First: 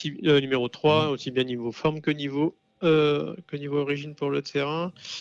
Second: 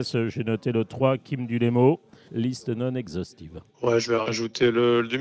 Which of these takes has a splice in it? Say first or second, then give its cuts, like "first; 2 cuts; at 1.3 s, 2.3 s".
second; 2 cuts; at 2.3 s, 3.7 s